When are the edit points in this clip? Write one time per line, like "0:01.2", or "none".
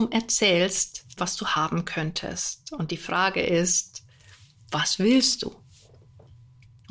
0:01.2